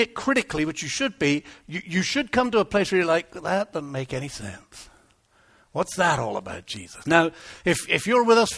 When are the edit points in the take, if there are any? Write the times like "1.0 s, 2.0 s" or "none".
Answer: 7.0 s